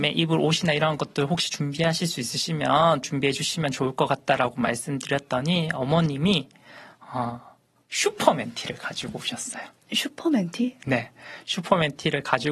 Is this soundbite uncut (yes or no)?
yes